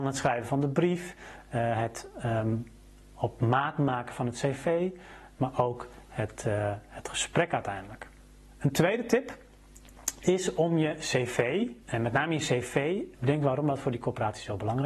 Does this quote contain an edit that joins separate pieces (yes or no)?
yes